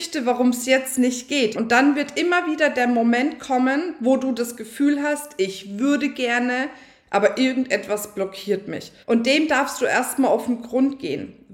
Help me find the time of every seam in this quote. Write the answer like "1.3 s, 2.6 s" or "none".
1.5 s, 9.0 s